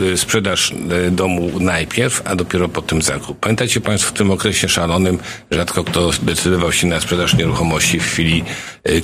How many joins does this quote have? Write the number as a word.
zero